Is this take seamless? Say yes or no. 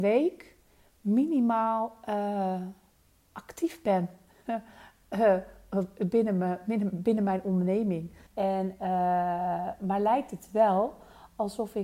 no